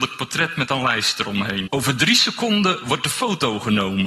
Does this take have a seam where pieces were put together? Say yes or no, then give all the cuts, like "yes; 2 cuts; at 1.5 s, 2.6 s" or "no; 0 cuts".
yes; 1 cut; at 1.7 s